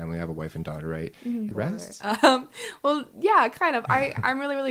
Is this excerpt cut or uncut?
cut